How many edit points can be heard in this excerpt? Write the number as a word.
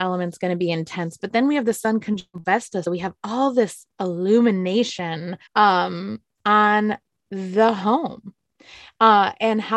two